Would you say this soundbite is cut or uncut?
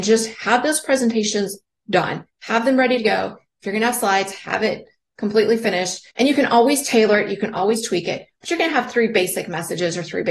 cut